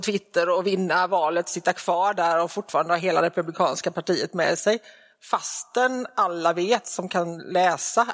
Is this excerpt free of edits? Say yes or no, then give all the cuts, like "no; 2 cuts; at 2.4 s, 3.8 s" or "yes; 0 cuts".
yes; 0 cuts